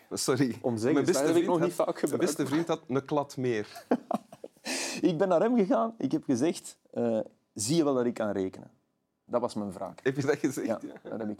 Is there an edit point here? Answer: yes; 1 cut; at 9.3 s

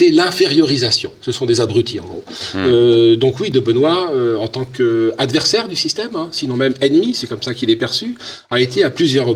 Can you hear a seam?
no; 0 cuts

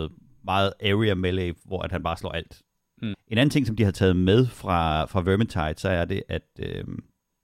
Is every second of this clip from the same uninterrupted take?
no; 1 cut; at 3.1 s

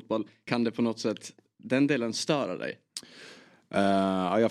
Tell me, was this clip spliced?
no; 0 cuts

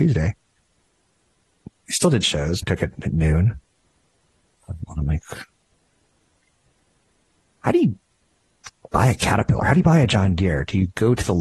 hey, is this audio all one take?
no; 2 cuts; at 2.6 s, 4.9 s

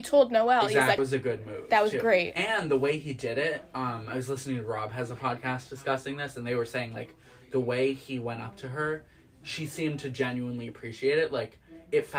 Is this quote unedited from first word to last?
no; 1 cut; at 1.0 s

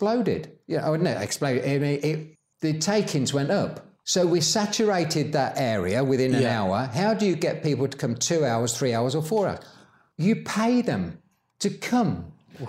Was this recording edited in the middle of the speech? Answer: no; 0 cuts

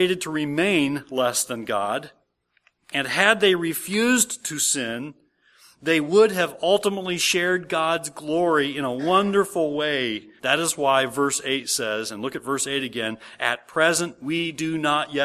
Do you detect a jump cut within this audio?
yes; 1 cut; at 10.4 s

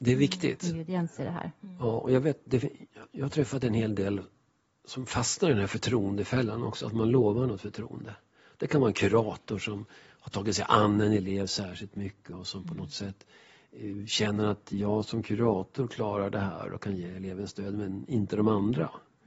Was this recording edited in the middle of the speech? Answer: no; 0 cuts

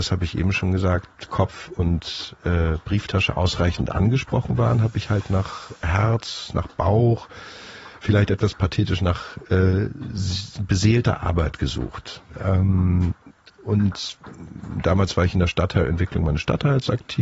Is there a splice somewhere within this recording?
no; 0 cuts

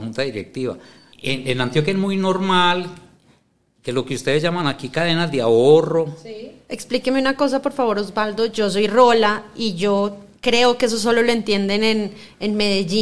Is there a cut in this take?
yes; 2 cuts; at 1.1 s, 6.7 s

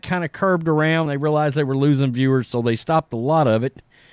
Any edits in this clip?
no; 0 cuts

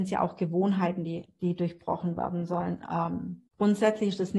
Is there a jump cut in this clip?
yes; 1 cut; at 3.5 s

